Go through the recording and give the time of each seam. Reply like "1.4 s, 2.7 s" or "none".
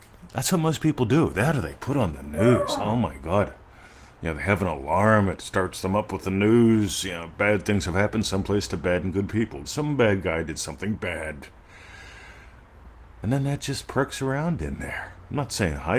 9.6 s